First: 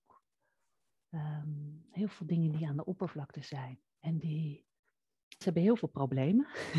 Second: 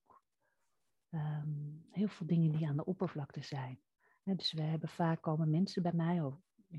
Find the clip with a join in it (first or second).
first